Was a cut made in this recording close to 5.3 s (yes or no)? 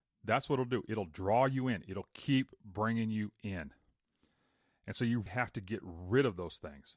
yes